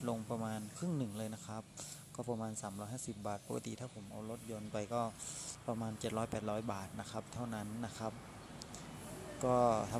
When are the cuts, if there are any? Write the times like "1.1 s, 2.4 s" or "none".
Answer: none